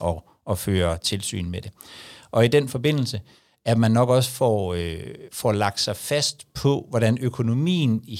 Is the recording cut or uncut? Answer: uncut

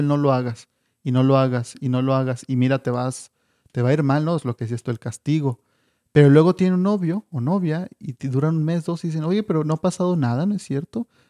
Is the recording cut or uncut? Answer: uncut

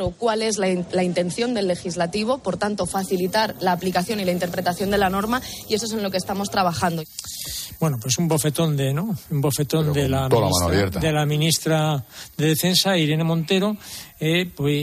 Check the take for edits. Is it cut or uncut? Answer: uncut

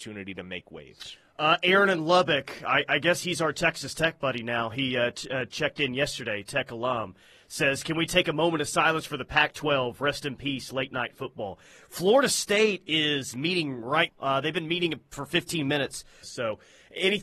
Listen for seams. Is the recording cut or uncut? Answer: cut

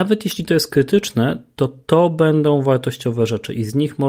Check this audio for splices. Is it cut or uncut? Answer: uncut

